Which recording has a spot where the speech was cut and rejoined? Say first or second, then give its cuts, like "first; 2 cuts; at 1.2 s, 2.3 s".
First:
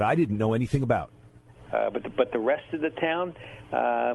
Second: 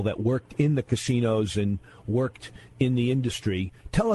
first; 1 cut; at 1.7 s